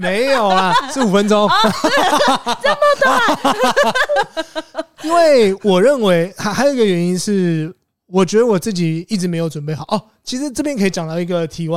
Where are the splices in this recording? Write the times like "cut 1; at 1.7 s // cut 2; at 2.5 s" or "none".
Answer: none

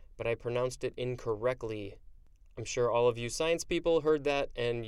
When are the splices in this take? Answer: none

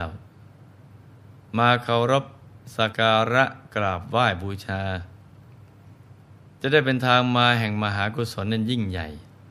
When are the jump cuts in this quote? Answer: cut 1; at 2.9 s

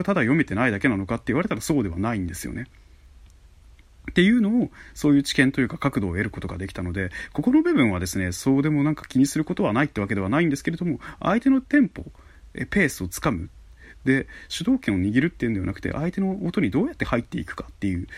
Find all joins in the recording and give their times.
none

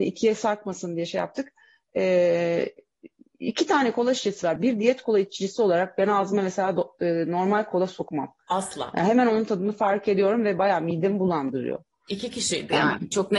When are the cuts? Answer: cut 1; at 4.6 s

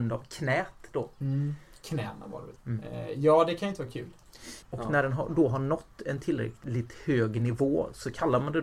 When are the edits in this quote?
cut 1; at 2.6 s // cut 2; at 4.6 s

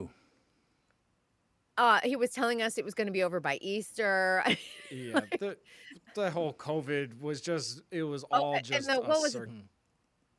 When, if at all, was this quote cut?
cut 1; at 9.5 s

